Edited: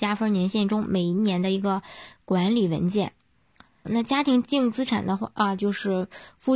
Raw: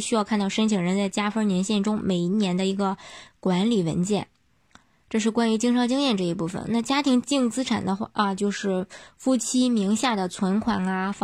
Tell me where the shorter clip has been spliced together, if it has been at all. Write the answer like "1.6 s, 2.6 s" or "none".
3.8 s

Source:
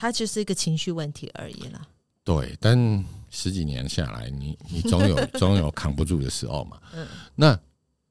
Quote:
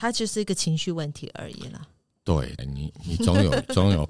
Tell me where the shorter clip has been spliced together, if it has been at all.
2.6 s

